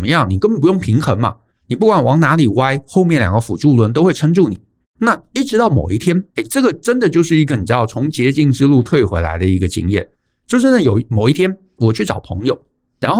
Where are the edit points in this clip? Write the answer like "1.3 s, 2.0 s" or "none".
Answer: 4.8 s, 6.3 s